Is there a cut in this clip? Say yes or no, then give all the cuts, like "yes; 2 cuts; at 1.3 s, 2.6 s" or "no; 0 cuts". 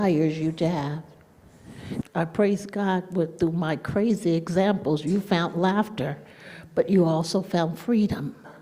yes; 1 cut; at 2.0 s